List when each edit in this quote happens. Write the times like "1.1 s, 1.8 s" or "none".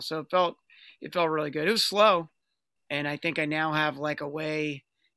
2.8 s